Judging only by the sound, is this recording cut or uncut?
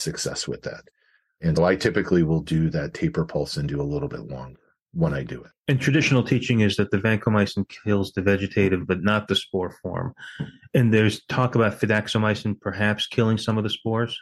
cut